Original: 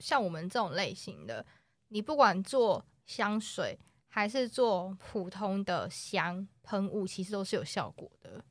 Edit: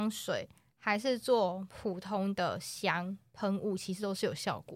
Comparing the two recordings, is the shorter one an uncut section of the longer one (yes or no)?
yes